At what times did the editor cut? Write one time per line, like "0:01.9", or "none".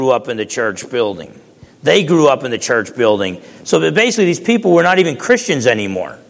none